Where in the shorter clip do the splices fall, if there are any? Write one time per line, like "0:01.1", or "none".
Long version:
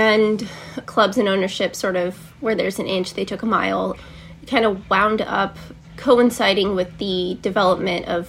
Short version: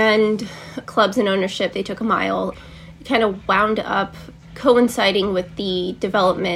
0:01.7